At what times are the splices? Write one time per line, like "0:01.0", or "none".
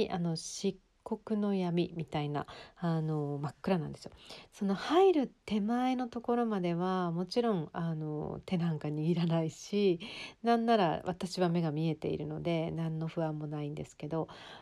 0:04.5